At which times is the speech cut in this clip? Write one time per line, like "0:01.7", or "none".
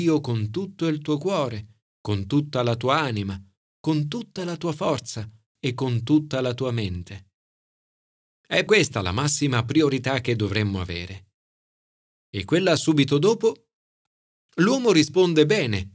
0:08.7
0:14.4

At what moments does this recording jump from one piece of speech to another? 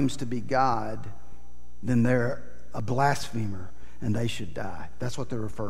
none

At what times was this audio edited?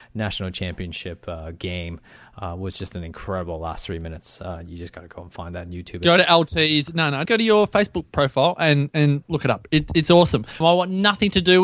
0:07.3
0:10.6

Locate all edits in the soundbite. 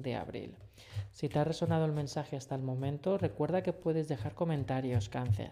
none

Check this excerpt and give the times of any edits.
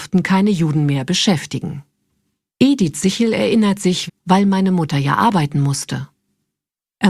0:02.5
0:04.1

